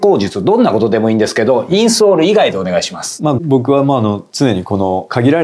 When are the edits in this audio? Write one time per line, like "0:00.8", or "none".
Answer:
0:03.4